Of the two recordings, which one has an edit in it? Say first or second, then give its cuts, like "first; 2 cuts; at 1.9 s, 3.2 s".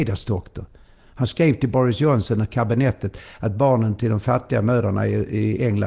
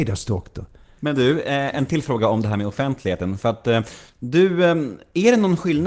second; 1 cut; at 1.0 s